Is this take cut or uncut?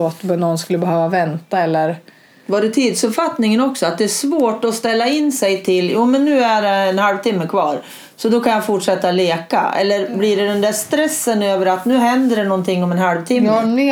uncut